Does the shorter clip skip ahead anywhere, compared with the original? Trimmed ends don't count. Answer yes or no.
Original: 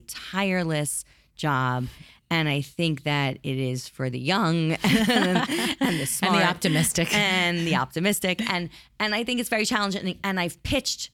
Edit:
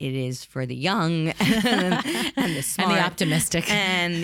no